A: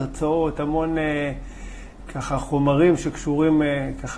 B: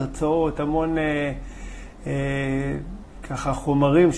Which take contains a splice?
A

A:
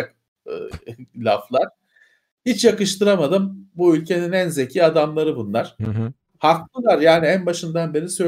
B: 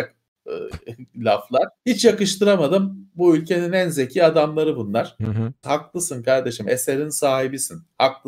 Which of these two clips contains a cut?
B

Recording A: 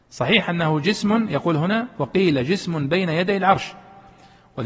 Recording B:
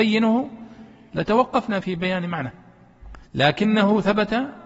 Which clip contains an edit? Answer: B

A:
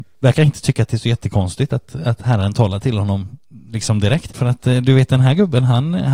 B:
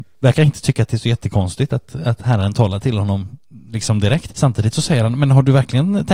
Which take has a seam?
A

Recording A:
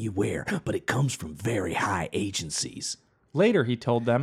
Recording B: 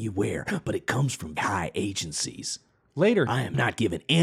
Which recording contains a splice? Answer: B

